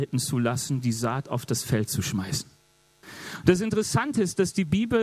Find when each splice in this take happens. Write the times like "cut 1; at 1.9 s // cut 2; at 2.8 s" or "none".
none